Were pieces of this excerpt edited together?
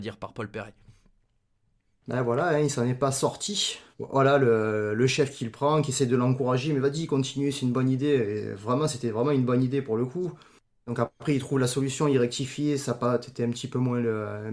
yes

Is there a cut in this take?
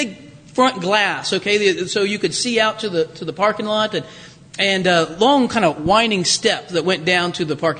no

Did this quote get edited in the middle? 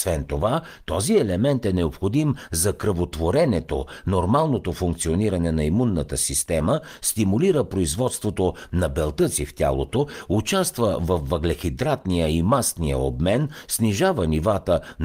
no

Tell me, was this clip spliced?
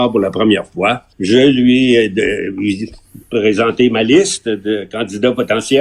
yes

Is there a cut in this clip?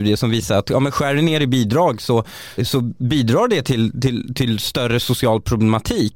yes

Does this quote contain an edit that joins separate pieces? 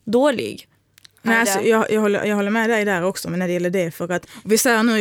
no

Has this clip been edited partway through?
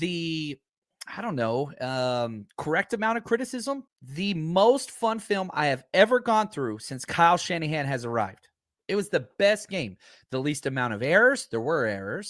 yes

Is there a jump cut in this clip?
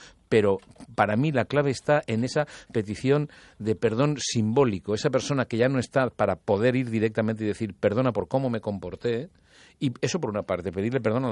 no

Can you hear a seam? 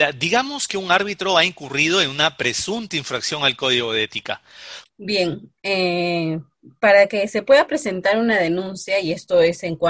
yes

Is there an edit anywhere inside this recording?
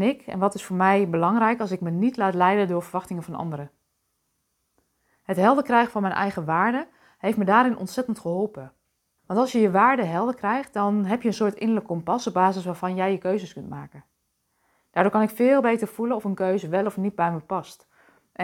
yes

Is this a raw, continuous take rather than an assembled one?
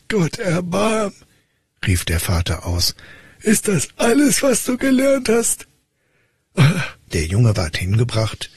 no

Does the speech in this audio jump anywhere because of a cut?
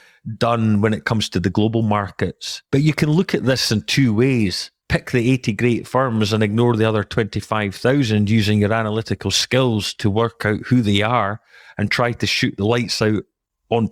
yes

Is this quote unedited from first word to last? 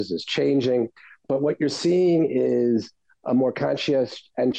yes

